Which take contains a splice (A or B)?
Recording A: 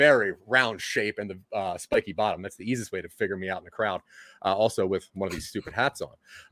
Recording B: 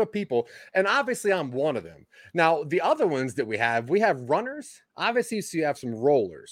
B